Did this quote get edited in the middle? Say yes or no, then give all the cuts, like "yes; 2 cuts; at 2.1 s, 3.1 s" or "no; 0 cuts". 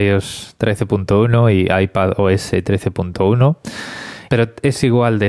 yes; 1 cut; at 4.3 s